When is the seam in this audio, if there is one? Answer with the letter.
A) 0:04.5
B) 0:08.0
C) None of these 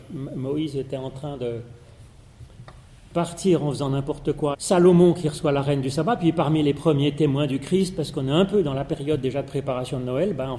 A